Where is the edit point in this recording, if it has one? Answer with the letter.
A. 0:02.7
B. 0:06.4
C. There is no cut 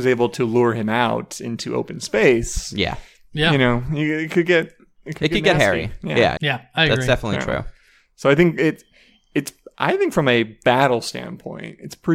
B